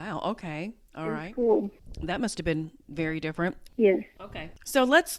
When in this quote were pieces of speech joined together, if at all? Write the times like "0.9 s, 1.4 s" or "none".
3.7 s